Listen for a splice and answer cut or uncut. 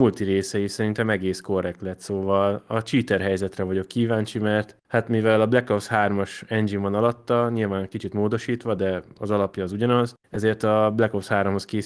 uncut